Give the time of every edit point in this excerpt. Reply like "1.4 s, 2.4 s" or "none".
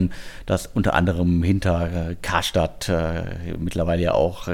none